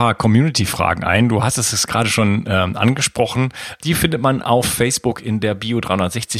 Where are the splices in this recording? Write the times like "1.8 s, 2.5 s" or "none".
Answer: 3.8 s